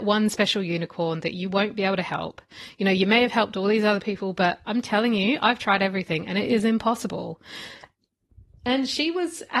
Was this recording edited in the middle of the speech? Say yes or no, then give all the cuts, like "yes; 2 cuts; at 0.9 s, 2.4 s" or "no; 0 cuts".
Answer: no; 0 cuts